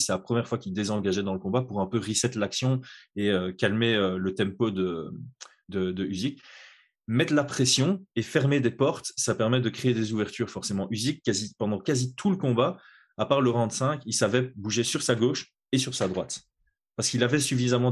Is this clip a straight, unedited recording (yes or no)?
yes